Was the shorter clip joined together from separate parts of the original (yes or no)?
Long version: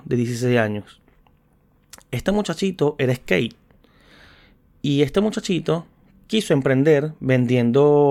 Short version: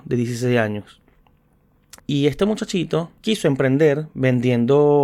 yes